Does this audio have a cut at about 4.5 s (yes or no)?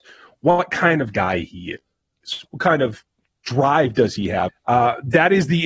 yes